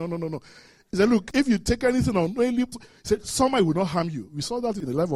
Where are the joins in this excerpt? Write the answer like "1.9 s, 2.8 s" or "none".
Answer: 2.7 s